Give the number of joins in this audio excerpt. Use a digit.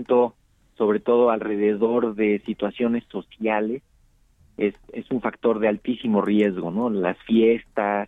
0